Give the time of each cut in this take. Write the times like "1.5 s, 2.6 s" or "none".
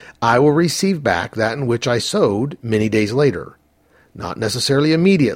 none